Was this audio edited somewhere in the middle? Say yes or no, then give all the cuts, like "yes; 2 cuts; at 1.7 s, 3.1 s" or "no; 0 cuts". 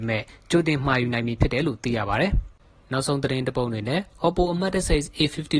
no; 0 cuts